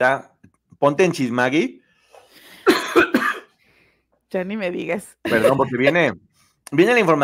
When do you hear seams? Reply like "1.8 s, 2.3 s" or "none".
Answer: none